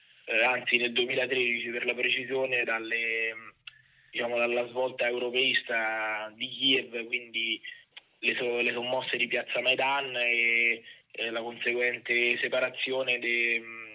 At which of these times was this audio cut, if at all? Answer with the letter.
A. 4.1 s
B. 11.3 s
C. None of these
C